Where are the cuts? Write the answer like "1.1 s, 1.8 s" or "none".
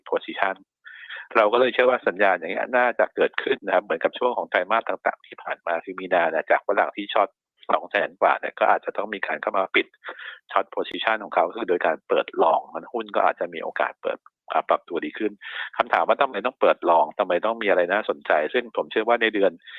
3.6 s